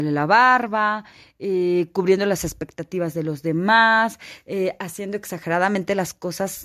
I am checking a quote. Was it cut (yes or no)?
no